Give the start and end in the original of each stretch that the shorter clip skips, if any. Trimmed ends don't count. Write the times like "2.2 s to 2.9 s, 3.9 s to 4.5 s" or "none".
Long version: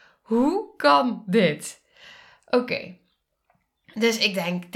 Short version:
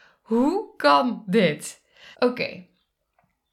2.1 s to 2.4 s